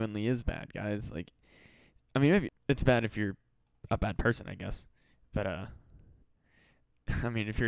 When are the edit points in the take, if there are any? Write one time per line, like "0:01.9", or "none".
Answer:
0:02.5